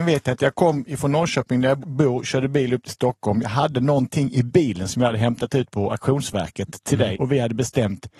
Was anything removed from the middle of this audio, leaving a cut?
yes; 2 cuts; at 1.8 s, 7.1 s

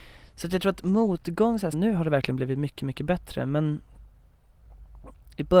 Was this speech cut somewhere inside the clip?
yes; 1 cut; at 1.7 s

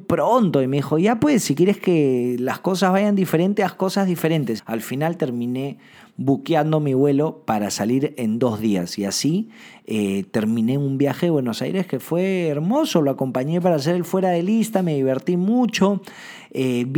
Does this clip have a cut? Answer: yes; 1 cut; at 4.6 s

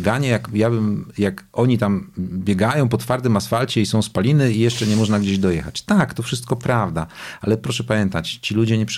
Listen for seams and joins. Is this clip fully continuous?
yes; 0 cuts

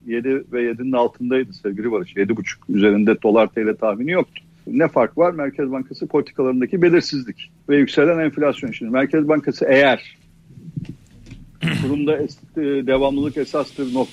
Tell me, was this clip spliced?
yes; 2 cuts; at 4.7 s, 7.6 s

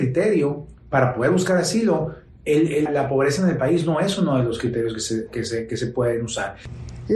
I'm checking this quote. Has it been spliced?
yes; 1 cut; at 2.9 s

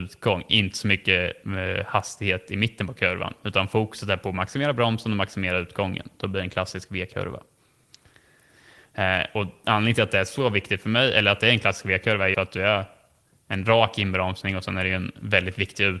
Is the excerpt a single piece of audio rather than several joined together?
no; 1 cut; at 12.3 s

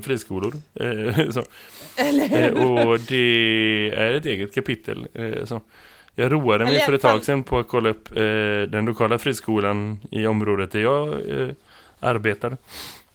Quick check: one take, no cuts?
yes; 0 cuts

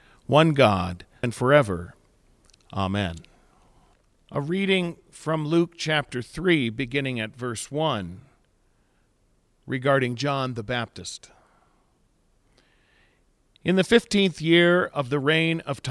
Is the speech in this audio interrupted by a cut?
yes; 1 cut; at 1.2 s

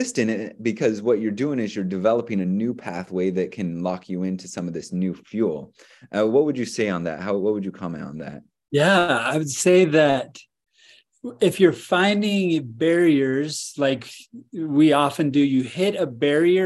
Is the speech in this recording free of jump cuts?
yes; 0 cuts

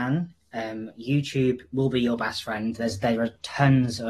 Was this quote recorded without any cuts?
yes; 0 cuts

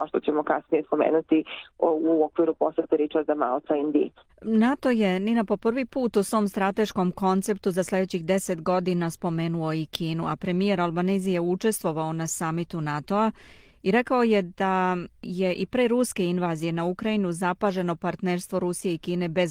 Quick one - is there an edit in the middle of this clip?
yes; 1 cut; at 4.3 s

